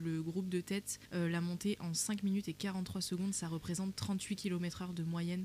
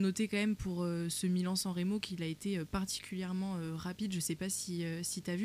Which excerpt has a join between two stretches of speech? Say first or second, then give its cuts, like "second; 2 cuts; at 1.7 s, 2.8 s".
first; 1 cut; at 1.1 s